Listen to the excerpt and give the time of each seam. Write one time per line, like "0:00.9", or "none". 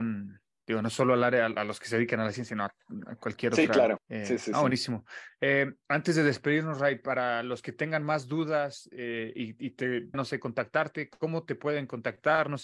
0:04.0
0:10.1